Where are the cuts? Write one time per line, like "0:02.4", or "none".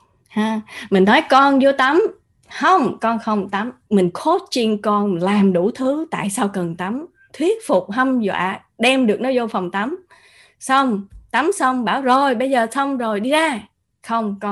0:03.9